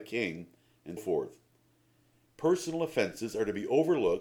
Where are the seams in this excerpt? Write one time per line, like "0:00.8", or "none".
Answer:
0:01.0